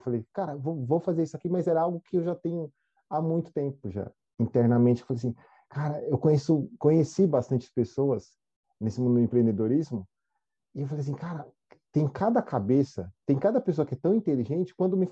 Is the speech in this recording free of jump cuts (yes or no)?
yes